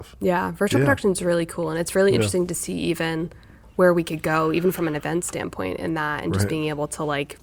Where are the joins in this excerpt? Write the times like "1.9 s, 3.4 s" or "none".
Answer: none